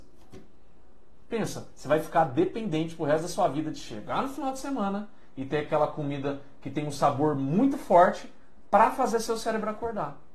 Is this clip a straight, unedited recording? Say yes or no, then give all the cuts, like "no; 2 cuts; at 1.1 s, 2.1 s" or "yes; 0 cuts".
yes; 0 cuts